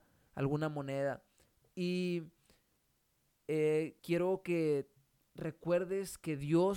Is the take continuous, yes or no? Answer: no